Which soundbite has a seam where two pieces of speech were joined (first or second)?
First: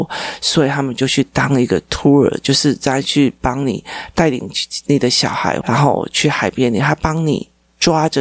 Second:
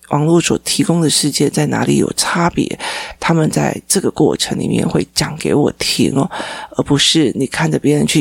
first